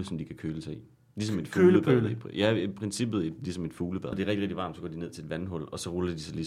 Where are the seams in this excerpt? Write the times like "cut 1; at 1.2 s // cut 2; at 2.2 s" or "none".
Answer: cut 1; at 4.1 s